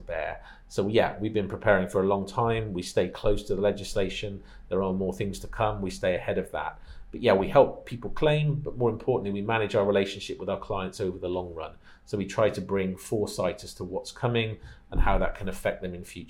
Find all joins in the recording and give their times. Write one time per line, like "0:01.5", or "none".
none